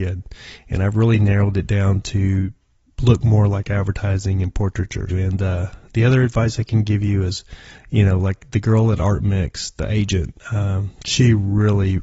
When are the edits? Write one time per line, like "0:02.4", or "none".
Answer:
0:05.1